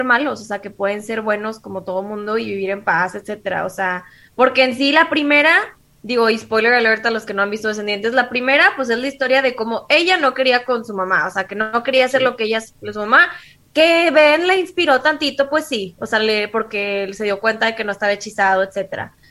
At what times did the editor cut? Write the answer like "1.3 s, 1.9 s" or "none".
none